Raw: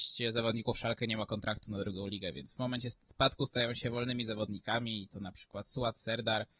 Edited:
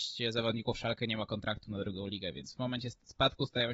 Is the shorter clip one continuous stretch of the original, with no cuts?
yes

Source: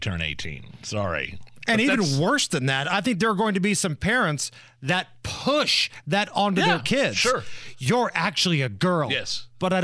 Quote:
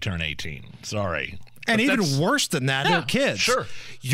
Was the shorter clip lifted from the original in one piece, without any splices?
no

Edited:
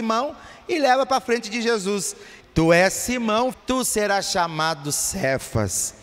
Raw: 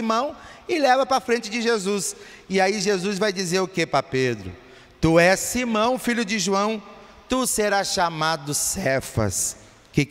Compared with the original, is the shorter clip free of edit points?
no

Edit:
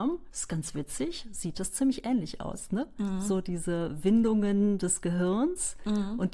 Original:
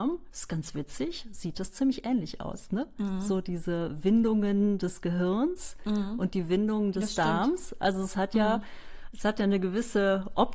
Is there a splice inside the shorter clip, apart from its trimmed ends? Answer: no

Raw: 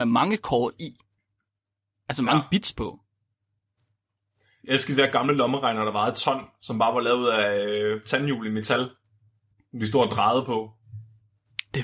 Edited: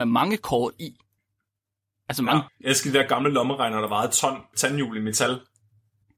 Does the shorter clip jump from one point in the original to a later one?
yes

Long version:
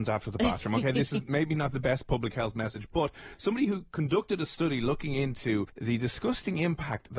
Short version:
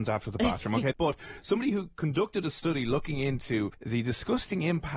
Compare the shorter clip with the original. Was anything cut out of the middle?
yes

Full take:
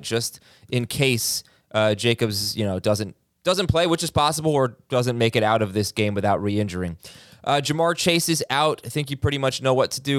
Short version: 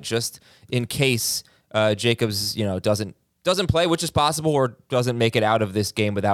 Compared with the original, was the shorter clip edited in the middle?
no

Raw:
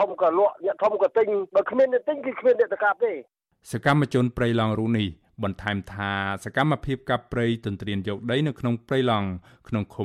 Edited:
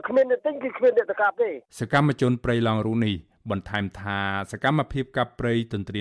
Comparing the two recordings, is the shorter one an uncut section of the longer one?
no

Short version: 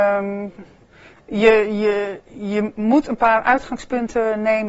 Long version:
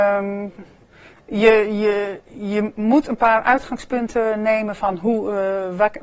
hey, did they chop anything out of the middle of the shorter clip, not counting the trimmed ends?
no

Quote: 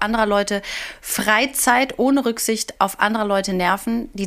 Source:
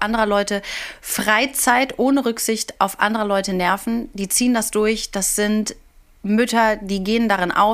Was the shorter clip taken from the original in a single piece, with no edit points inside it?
yes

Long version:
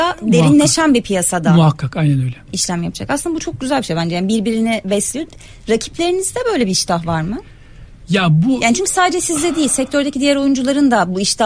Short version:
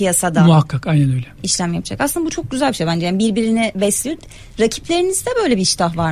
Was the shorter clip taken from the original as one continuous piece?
yes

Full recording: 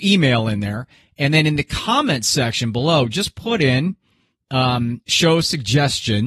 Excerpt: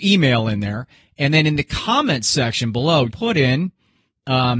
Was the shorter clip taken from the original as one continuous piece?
no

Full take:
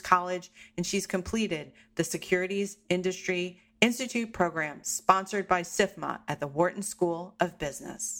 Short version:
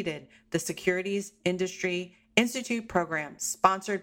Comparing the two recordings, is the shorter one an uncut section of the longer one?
yes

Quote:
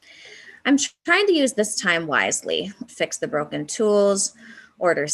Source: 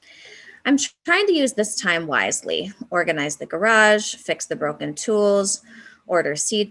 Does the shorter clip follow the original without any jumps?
no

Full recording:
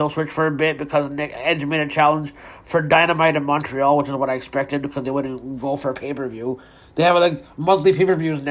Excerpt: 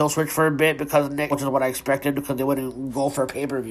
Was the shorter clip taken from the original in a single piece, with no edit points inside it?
no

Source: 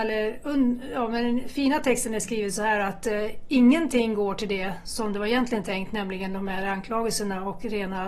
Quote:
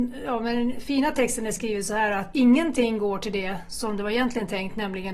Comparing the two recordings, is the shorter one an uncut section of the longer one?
no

